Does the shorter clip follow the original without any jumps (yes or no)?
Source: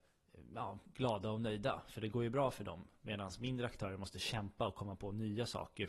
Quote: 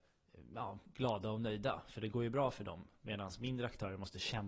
yes